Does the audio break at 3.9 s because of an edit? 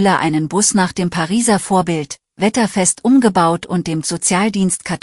no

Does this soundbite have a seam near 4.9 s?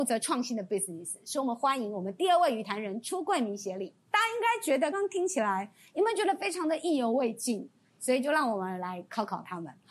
yes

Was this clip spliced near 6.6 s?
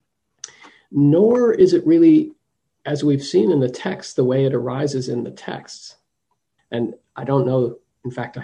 yes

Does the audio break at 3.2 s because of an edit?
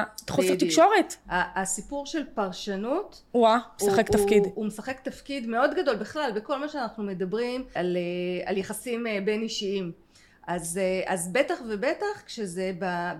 no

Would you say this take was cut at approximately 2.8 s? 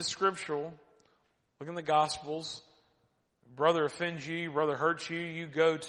no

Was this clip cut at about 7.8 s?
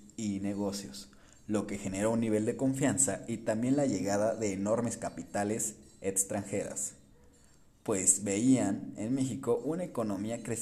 no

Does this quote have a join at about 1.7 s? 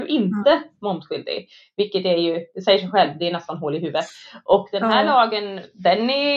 no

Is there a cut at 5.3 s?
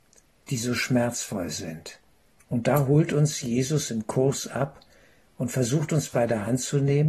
no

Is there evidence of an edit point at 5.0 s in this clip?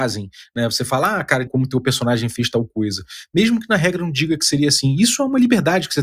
no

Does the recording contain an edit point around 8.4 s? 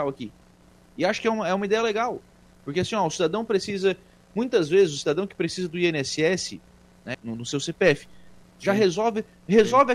yes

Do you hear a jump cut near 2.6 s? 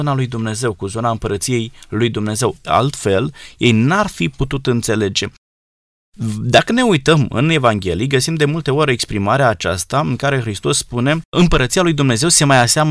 no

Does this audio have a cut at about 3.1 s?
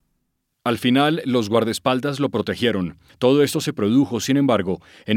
yes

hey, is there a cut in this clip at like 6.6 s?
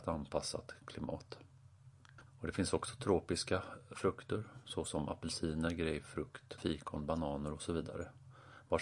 yes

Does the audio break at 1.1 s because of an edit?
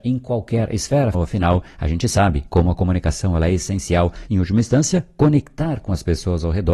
yes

